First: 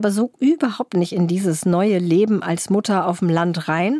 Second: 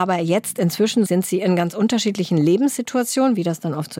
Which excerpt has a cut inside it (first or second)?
second